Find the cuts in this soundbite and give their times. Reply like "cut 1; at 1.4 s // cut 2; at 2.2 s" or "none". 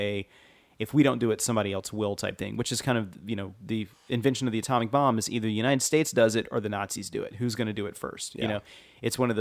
none